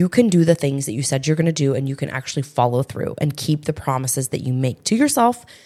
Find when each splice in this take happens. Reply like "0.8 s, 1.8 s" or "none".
none